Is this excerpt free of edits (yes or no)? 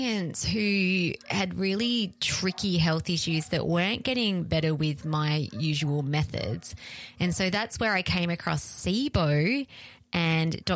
yes